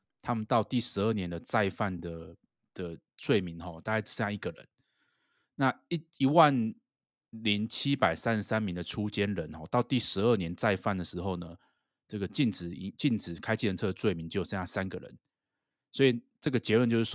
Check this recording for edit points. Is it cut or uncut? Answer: uncut